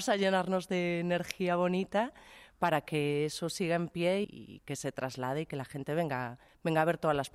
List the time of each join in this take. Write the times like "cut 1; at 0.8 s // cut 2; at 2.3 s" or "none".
cut 1; at 4.2 s